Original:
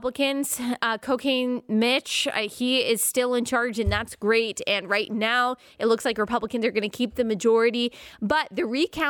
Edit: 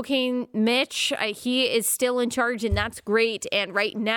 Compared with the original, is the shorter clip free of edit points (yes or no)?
yes